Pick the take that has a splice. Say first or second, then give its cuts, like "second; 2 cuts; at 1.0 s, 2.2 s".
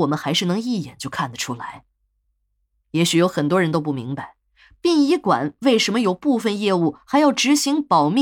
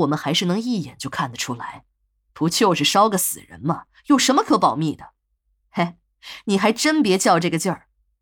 second; 1 cut; at 2.2 s